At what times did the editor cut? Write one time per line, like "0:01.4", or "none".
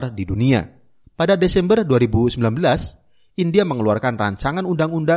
0:01.0